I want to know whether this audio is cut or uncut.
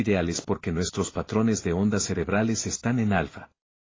uncut